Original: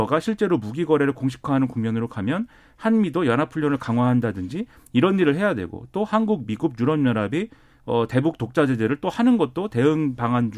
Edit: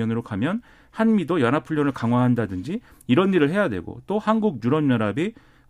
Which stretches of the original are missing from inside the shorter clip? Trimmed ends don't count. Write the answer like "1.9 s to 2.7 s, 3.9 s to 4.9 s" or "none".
6.5 s to 6.8 s